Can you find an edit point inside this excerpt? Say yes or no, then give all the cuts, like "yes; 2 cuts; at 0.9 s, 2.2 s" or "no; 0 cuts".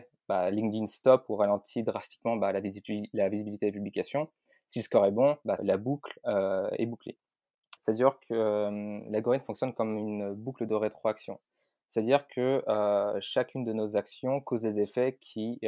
yes; 2 cuts; at 5.6 s, 7.8 s